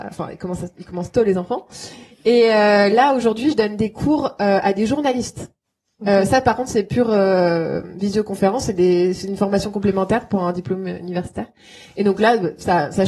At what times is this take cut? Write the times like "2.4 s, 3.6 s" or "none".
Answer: none